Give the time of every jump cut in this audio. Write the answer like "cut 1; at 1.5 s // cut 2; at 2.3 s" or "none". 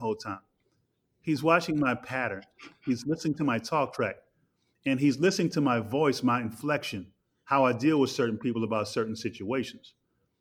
none